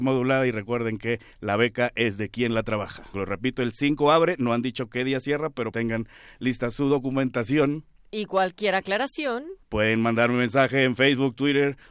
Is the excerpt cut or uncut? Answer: cut